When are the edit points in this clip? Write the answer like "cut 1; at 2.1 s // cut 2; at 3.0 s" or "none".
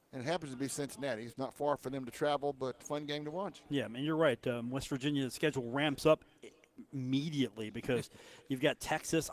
cut 1; at 1.3 s // cut 2; at 2.8 s